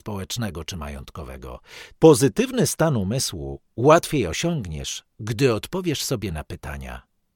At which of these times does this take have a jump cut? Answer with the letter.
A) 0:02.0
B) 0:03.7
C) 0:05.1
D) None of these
A